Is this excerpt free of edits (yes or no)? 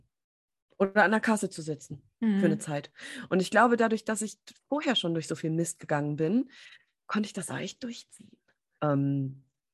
no